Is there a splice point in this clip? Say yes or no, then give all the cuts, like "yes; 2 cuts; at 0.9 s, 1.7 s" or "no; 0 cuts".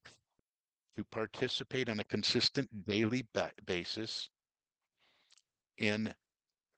no; 0 cuts